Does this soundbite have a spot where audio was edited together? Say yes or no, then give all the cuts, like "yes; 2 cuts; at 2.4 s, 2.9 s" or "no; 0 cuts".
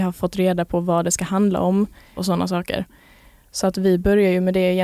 yes; 1 cut; at 2.2 s